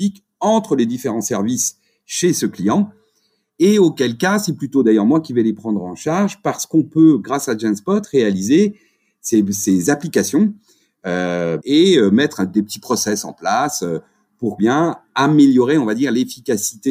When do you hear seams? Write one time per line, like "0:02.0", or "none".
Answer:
0:11.6
0:14.6